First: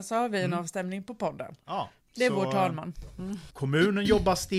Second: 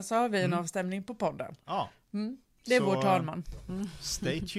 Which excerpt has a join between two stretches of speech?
first; 2 cuts; at 2.0 s, 3.5 s

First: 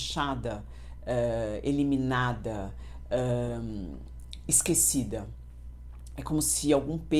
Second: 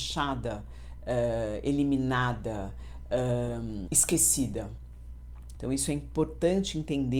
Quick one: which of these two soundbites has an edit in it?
second; 2 cuts; at 3.9 s, 5.6 s

